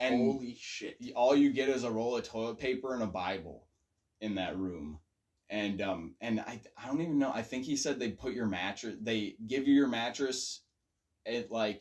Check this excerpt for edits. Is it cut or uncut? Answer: uncut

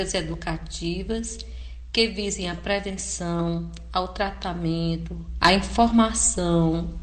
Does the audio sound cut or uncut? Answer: cut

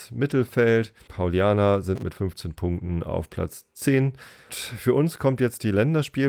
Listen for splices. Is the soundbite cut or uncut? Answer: cut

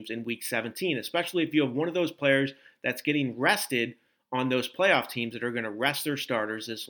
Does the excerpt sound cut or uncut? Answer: uncut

